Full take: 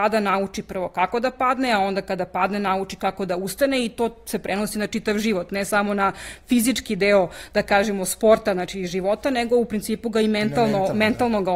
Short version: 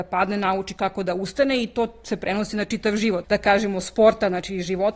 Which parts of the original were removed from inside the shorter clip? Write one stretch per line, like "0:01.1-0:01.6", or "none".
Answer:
0:05.5-0:07.5